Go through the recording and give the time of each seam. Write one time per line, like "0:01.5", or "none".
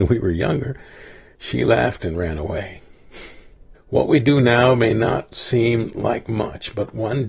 0:03.7